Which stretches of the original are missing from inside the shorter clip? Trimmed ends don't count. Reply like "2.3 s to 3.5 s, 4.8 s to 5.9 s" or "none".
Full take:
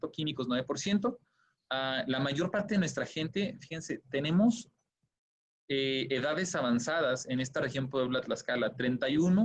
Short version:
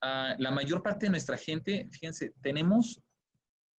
none